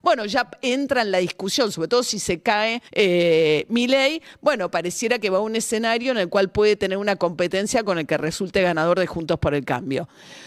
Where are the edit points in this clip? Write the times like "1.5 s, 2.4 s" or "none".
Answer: 2.9 s